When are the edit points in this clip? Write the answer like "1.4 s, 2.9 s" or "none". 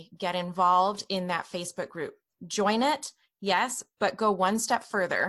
none